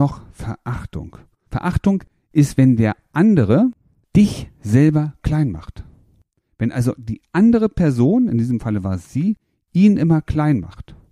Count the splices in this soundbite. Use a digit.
2